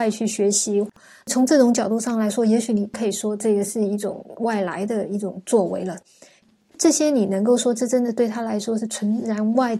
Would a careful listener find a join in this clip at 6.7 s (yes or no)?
yes